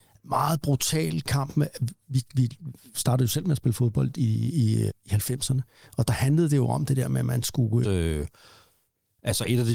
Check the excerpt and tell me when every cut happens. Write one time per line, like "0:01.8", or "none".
0:04.9
0:07.8